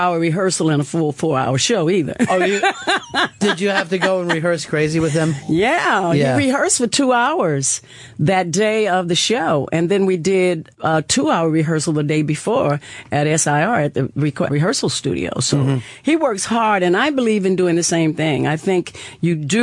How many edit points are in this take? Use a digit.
1